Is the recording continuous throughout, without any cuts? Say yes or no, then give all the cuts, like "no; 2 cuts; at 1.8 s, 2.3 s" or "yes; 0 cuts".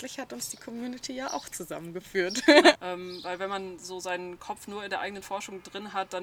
no; 1 cut; at 2.7 s